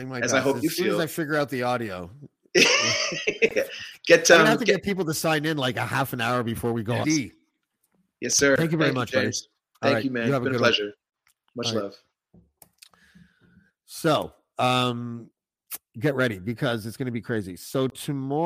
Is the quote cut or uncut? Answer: cut